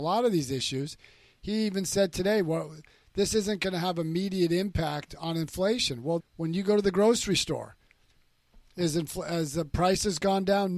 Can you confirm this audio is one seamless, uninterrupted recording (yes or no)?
no